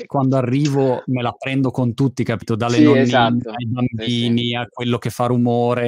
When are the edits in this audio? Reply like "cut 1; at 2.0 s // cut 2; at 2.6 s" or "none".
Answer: none